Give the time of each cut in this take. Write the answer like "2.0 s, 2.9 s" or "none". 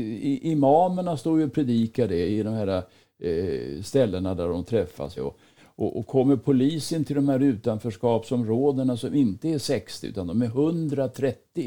5.2 s